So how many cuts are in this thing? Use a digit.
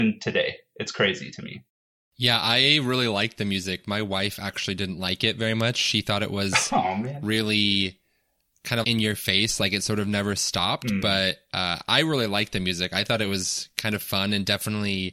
1